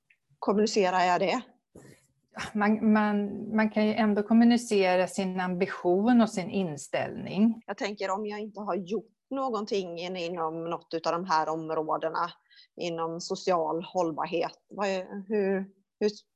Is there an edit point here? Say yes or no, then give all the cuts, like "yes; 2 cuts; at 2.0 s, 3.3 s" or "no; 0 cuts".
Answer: yes; 1 cut; at 7.6 s